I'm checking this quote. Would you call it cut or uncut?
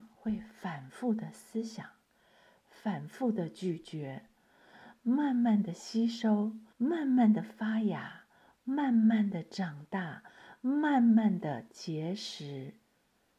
cut